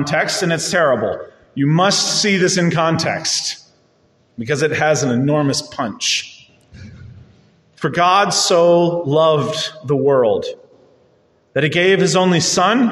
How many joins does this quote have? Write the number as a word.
zero